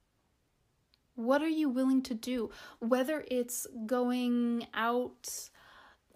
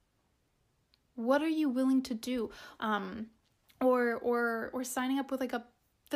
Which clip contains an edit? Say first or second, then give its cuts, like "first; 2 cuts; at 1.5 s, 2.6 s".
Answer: second; 1 cut; at 2.8 s